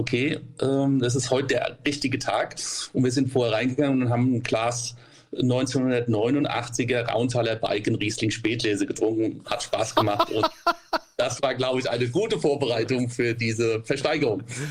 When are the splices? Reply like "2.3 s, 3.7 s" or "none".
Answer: 9.4 s